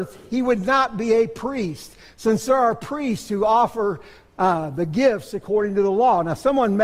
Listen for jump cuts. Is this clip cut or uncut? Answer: uncut